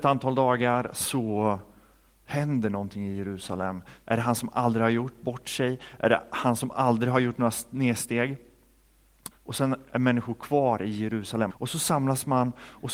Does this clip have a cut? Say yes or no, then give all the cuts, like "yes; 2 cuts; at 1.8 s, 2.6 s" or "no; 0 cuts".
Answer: yes; 3 cuts; at 4.1 s, 9.3 s, 11.5 s